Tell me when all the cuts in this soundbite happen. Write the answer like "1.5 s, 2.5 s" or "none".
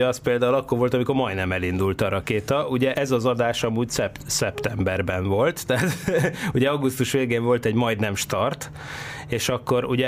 2.9 s